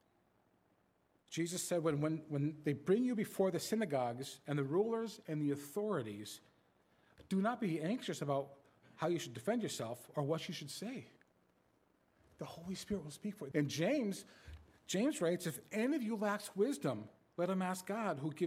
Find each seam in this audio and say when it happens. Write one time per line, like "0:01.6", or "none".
0:13.5